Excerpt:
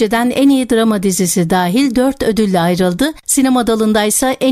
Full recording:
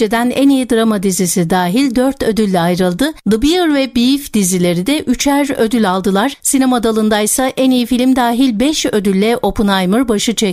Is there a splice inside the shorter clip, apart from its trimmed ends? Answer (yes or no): yes